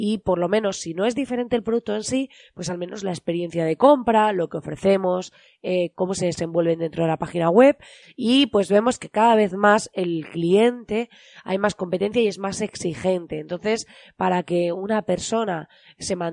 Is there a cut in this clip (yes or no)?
yes